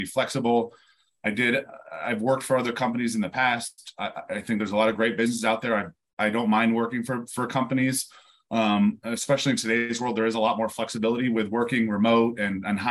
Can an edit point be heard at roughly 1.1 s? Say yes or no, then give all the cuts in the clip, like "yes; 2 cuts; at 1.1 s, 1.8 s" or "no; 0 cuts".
no; 0 cuts